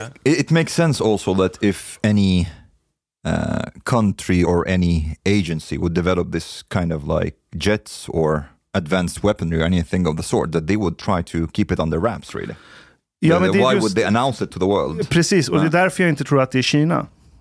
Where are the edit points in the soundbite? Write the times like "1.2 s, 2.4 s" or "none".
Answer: 4.4 s